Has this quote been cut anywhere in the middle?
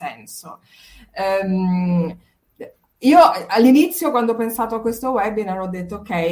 no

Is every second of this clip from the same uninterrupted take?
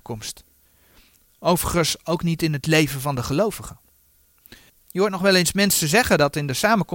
no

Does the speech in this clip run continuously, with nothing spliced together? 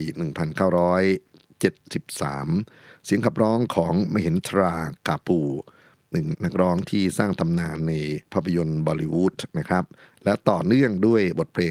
no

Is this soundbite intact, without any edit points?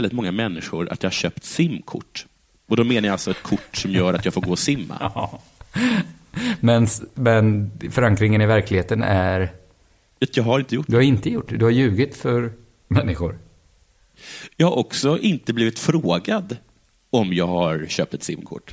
yes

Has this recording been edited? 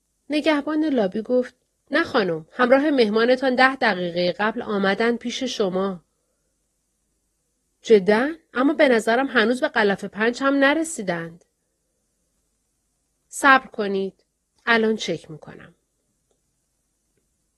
no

